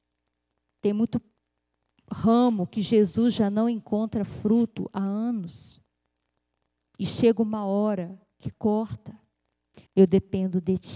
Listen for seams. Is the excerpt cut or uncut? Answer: cut